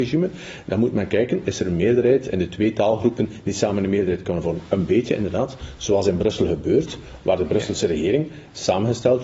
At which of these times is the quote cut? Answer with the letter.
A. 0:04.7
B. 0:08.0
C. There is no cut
C